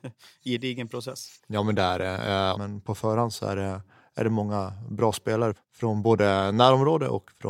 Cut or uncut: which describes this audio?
cut